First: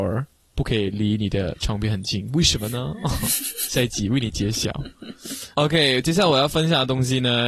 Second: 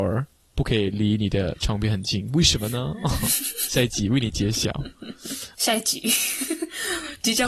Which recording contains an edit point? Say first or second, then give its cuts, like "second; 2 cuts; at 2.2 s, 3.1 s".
second; 1 cut; at 5.5 s